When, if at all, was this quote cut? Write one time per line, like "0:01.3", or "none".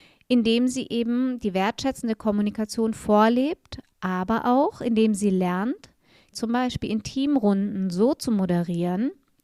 0:06.3